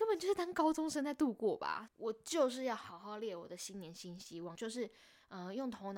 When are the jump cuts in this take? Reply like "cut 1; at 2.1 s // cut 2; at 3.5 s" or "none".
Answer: cut 1; at 1.9 s // cut 2; at 4.5 s